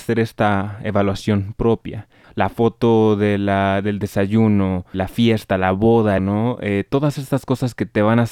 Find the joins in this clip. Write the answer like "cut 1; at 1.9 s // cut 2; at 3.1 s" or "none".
cut 1; at 2.2 s // cut 2; at 4.9 s // cut 3; at 6.2 s